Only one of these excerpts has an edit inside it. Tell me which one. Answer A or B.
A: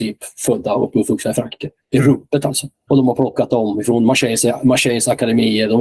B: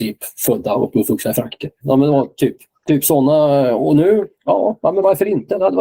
B